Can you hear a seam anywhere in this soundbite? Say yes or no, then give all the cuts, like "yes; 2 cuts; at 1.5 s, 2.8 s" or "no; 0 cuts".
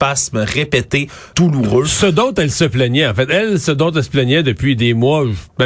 yes; 1 cut; at 1.3 s